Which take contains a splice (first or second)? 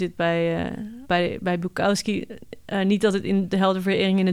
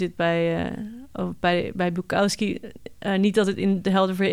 first